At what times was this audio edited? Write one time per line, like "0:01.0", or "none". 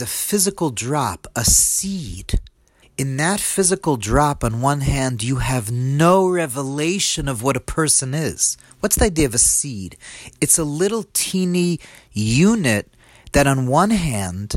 0:02.8